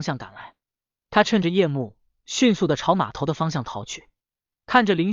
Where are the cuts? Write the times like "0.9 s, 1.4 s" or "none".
none